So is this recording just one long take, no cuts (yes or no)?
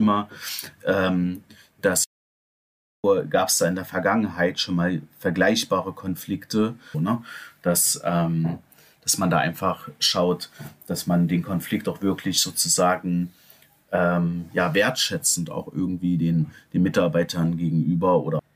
no